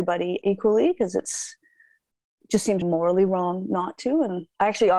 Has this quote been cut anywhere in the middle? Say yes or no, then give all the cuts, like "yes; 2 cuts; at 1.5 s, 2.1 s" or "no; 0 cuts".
yes; 1 cut; at 2.8 s